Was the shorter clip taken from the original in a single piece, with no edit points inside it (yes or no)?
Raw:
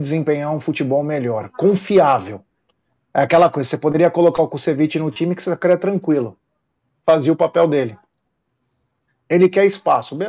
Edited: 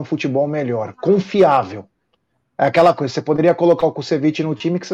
yes